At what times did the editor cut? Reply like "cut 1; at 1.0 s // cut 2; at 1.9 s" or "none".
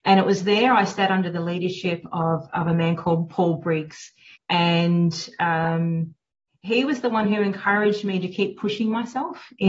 cut 1; at 4.4 s